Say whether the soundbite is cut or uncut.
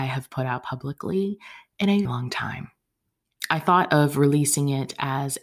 cut